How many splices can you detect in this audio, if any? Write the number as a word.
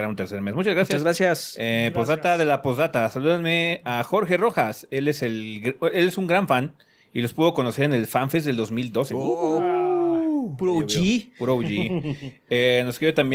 zero